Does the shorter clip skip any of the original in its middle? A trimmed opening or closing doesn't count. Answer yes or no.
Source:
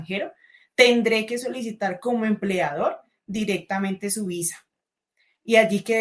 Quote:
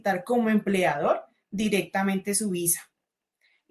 no